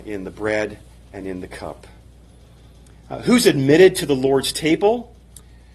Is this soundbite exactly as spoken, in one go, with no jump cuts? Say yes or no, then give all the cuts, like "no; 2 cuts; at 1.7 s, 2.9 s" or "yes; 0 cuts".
yes; 0 cuts